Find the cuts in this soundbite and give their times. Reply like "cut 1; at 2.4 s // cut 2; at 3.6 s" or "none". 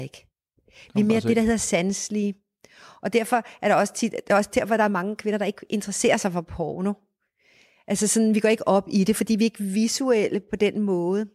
none